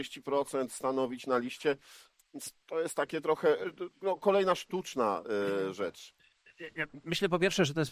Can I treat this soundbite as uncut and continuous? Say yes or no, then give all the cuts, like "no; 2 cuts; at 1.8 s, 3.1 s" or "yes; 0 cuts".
yes; 0 cuts